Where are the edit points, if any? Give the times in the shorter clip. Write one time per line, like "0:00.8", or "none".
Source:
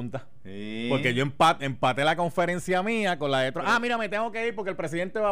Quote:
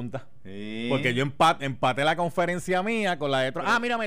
none